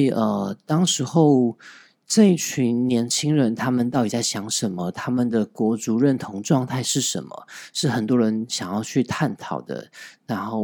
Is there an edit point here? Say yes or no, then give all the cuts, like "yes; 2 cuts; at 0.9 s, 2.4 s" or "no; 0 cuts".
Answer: no; 0 cuts